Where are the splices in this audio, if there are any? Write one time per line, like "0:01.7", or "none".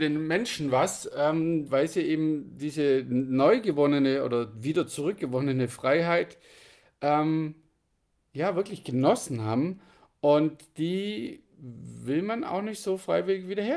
0:01.7